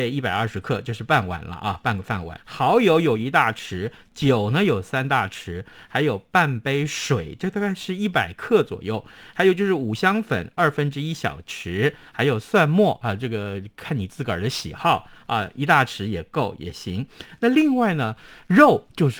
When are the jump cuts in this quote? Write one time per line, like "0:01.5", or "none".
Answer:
0:02.4